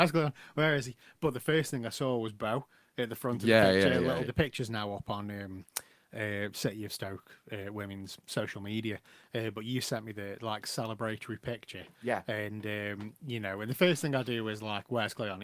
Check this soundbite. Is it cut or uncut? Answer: cut